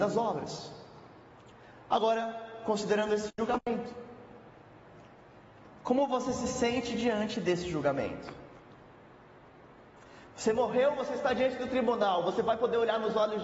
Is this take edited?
no; 0 cuts

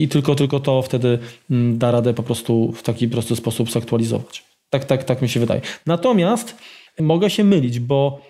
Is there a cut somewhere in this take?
no; 0 cuts

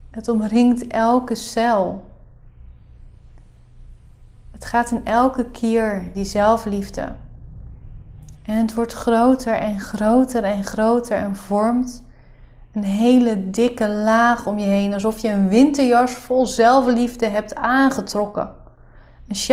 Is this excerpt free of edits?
no; 2 cuts; at 6.1 s, 8.3 s

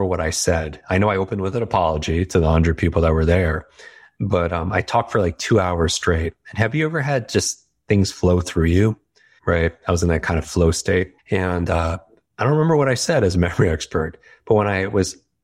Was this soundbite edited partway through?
no; 0 cuts

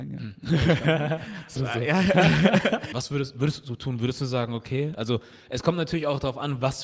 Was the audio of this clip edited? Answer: yes; 2 cuts; at 1.6 s, 2.9 s

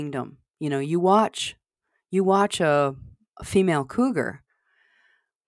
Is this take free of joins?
yes; 0 cuts

